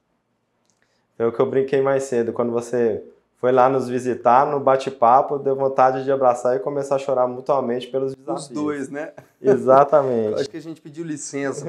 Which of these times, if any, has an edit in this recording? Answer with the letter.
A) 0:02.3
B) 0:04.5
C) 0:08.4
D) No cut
D